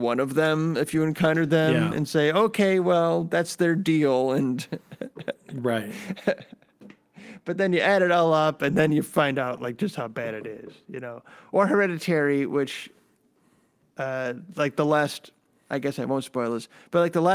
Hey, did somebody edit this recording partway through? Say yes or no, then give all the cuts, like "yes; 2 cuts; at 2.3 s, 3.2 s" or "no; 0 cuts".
no; 0 cuts